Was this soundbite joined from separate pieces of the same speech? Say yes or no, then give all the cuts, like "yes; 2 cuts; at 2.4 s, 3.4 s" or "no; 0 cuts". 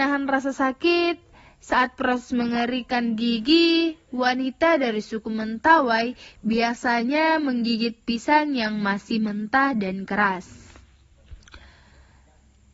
no; 0 cuts